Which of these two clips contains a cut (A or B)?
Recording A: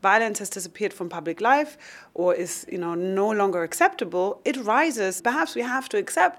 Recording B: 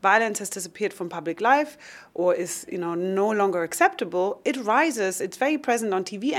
A